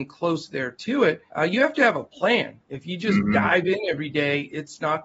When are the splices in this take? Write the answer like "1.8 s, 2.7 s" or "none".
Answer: 1.3 s